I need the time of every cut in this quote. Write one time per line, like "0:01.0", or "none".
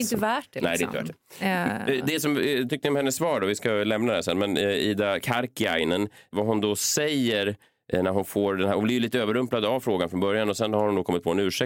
none